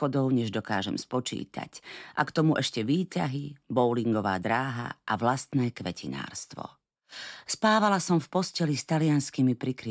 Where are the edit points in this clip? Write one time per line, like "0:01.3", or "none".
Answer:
none